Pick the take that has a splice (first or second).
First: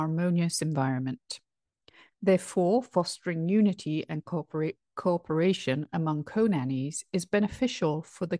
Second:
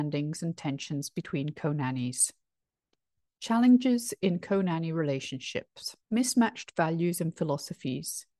second